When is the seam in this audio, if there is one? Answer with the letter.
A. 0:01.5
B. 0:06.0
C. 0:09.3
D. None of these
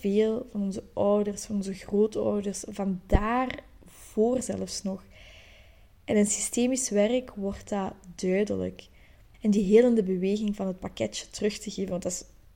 C